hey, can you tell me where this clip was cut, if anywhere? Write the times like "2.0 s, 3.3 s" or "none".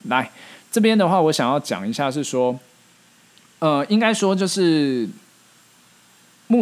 none